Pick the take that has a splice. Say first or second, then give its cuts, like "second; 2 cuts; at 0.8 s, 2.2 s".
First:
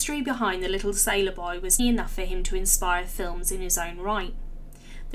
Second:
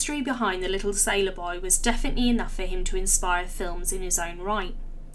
first; 1 cut; at 1.8 s